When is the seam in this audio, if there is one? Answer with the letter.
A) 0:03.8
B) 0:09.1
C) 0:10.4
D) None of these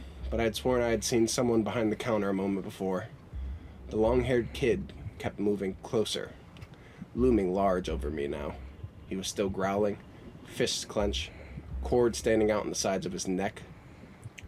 D